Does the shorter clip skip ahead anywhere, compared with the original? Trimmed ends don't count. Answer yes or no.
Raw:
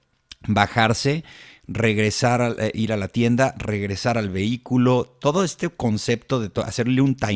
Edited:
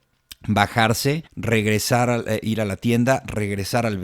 yes